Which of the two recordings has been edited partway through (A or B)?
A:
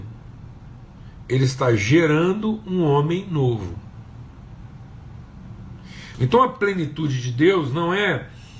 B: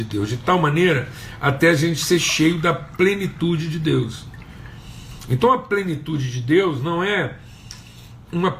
A